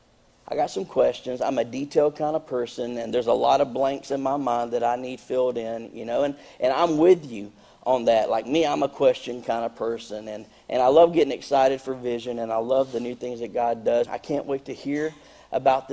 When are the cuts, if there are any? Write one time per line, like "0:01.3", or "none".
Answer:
0:14.1